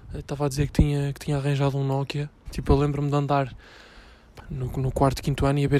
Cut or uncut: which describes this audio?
cut